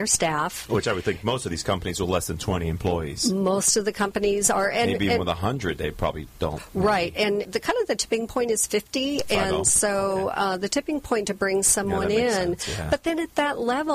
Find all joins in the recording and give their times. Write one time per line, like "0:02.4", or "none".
0:07.4